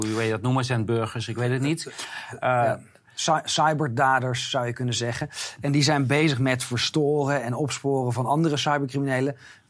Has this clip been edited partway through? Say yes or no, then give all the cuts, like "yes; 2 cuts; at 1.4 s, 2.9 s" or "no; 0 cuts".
no; 0 cuts